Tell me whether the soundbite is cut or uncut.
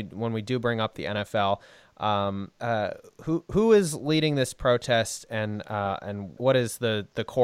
cut